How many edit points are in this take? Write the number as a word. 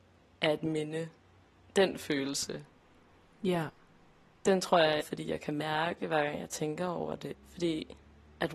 two